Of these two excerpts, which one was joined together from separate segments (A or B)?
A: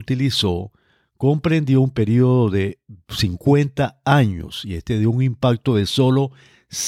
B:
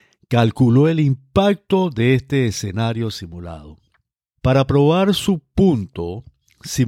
B